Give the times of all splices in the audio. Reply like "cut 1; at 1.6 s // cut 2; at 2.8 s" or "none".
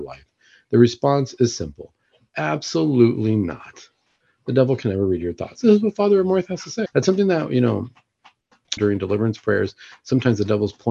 cut 1; at 5.6 s // cut 2; at 6.9 s // cut 3; at 8.8 s